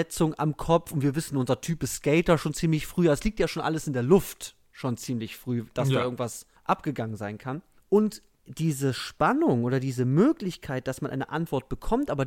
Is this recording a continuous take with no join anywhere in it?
yes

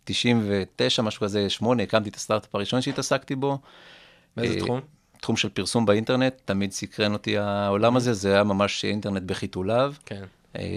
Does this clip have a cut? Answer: no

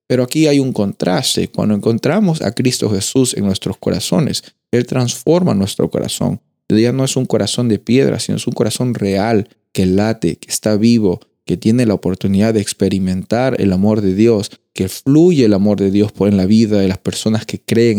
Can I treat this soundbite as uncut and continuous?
yes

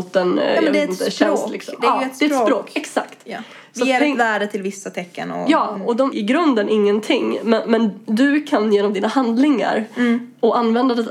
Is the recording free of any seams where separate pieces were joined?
no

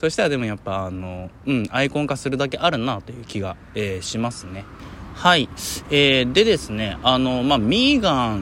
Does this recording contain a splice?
no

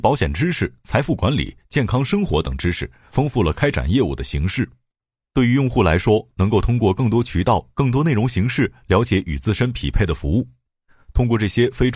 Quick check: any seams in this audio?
no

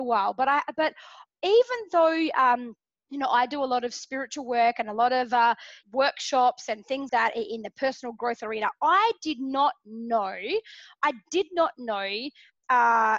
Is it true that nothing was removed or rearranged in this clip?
no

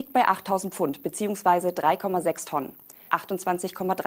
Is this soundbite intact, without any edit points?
no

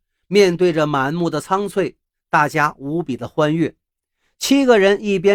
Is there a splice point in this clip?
no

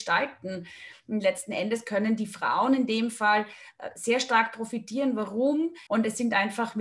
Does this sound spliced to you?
yes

